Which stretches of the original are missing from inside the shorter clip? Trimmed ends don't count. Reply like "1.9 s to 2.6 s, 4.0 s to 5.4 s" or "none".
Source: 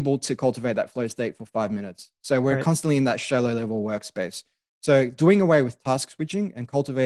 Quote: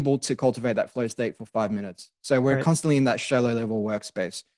none